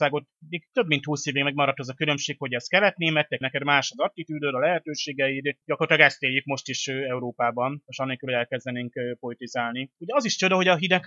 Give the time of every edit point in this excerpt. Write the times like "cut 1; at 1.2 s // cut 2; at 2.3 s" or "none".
cut 1; at 3.4 s // cut 2; at 9.9 s